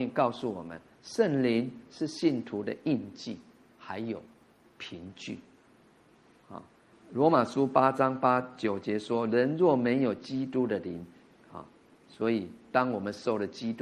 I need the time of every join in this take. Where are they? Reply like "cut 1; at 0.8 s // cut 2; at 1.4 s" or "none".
cut 1; at 6.9 s // cut 2; at 11.3 s